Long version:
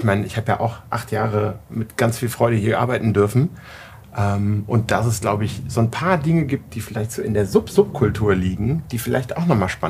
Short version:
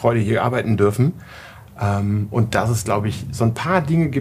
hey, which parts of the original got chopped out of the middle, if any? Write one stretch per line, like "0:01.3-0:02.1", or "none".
none